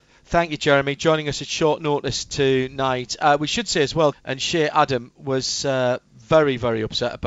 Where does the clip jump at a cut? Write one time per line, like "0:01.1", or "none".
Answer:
0:04.1

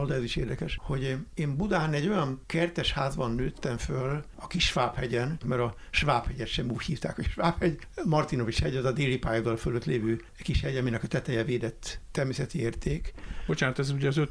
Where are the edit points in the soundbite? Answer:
0:05.4

